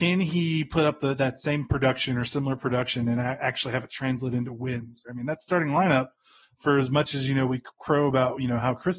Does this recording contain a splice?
yes; 1 cut; at 5.0 s

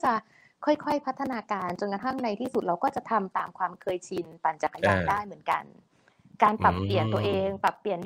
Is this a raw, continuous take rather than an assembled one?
yes; 0 cuts

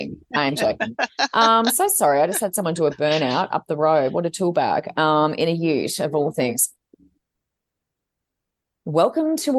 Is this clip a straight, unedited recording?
yes; 0 cuts

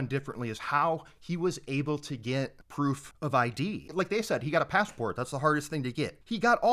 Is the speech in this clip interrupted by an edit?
no; 0 cuts

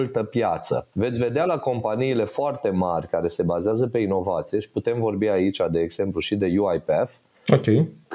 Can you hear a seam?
yes; 1 cut; at 0.9 s

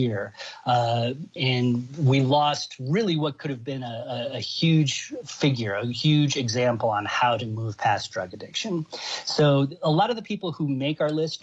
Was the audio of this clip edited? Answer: yes; 1 cut; at 1.4 s

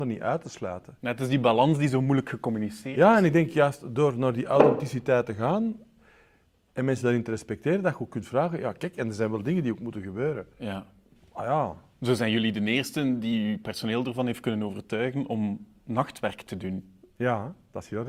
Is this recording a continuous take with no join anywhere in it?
yes; 0 cuts

